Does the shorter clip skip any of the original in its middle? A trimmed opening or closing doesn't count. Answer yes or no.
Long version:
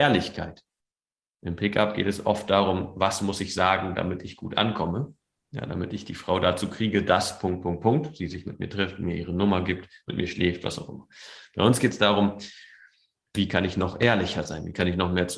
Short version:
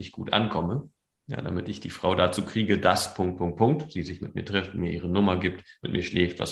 no